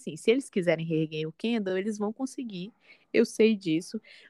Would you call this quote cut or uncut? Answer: uncut